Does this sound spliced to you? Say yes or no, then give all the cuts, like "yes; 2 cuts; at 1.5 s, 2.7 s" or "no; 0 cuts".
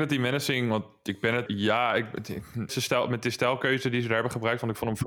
yes; 2 cuts; at 1.5 s, 2.7 s